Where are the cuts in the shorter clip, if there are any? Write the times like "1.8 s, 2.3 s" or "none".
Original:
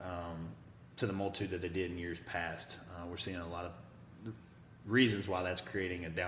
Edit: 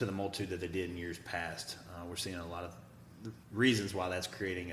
3.4 s